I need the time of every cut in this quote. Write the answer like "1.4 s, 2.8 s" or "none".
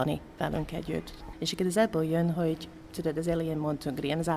1.3 s

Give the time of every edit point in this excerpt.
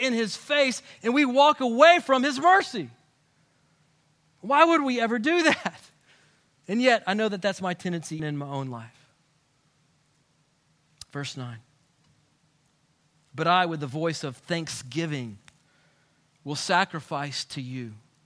8.2 s

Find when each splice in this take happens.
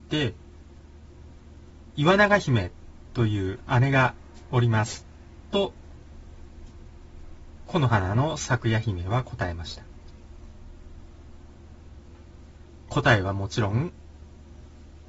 12.9 s

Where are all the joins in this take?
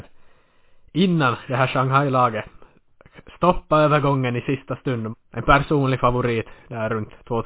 5.1 s

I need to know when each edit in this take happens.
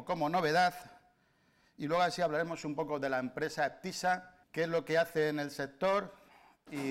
4.4 s

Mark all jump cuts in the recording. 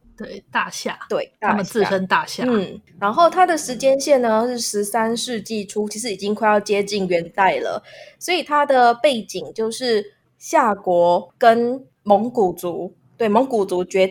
none

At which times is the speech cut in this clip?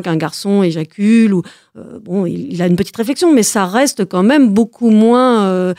none

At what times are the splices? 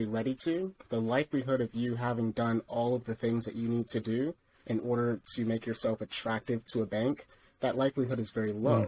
none

